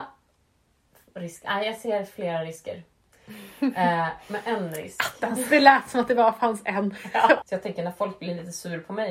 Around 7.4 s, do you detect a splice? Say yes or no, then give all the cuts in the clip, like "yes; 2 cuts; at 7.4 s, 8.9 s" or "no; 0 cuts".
yes; 1 cut; at 7.4 s